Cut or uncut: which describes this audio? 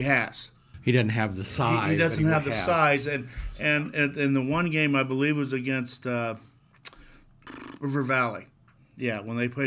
uncut